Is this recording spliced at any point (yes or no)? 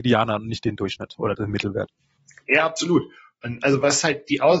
no